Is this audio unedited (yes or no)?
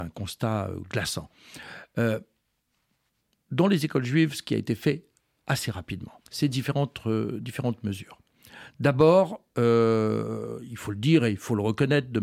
no